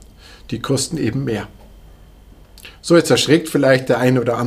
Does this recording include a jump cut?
no; 0 cuts

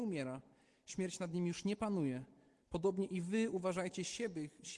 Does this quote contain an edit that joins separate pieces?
yes; 1 cut; at 2.6 s

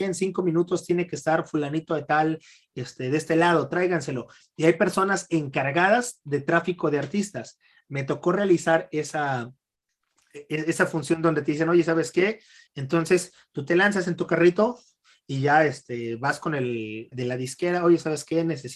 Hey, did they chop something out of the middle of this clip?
yes; 2 cuts; at 12.7 s, 17.1 s

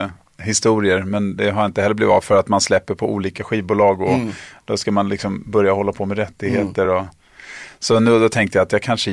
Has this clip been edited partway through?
no; 0 cuts

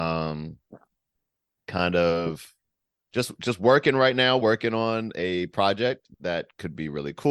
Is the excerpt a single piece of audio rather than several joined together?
yes; 0 cuts

